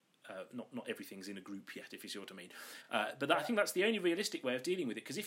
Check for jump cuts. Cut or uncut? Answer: uncut